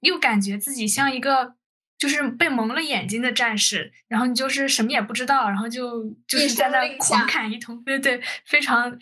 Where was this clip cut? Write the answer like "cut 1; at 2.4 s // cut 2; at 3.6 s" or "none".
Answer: cut 1; at 7.9 s